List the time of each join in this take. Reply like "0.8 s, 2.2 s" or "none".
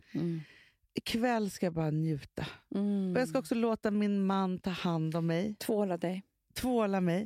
none